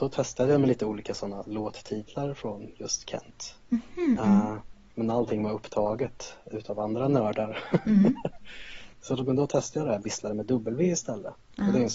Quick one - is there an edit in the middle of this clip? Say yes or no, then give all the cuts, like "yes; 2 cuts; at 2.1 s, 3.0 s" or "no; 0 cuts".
yes; 1 cut; at 8.9 s